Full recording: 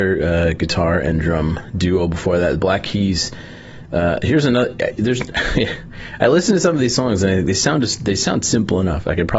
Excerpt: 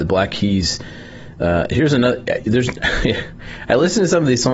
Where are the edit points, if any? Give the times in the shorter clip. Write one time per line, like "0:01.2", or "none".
none